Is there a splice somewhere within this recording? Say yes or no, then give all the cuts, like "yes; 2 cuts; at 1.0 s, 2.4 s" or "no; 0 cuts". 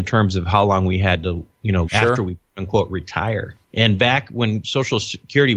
yes; 1 cut; at 1.8 s